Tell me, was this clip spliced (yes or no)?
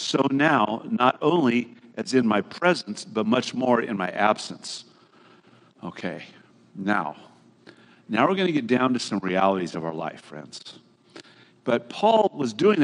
yes